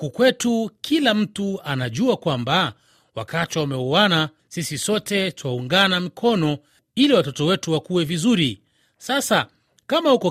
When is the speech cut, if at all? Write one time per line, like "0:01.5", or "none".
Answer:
none

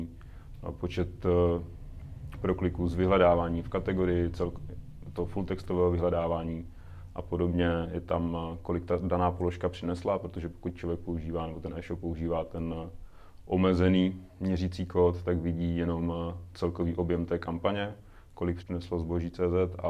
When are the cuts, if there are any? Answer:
0:18.6

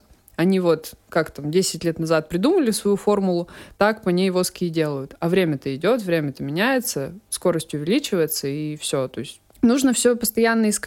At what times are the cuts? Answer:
none

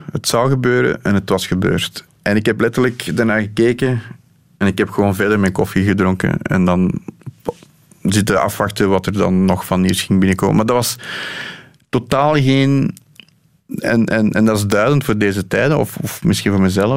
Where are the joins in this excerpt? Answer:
none

